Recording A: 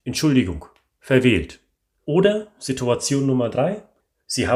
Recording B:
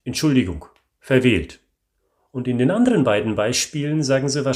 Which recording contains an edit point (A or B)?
A